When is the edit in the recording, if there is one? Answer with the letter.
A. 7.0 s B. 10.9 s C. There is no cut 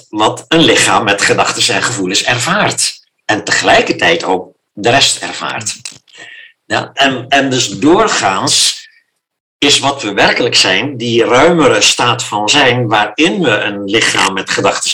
A